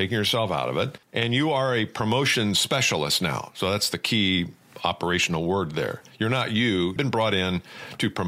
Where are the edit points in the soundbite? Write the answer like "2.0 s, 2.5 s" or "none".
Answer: 1.0 s, 7.0 s